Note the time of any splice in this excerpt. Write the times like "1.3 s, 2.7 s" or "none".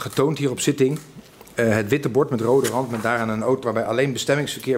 3.6 s